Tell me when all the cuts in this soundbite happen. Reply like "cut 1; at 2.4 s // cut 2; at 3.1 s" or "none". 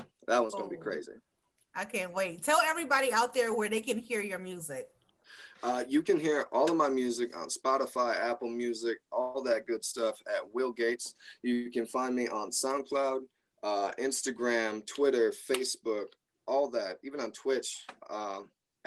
none